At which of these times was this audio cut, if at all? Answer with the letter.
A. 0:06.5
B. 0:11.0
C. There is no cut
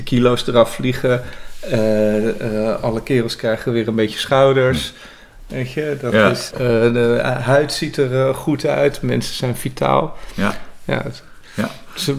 A